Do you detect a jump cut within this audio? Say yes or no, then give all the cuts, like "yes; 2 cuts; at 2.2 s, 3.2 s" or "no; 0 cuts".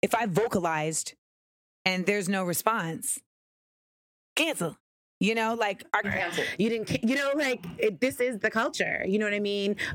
yes; 1 cut; at 6.0 s